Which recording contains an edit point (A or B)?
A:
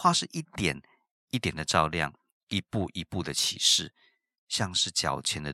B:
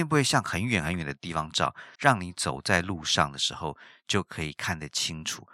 B